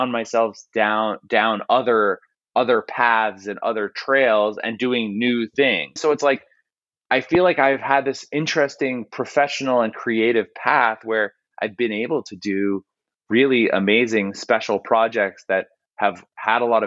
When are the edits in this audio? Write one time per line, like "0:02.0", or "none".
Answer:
0:06.0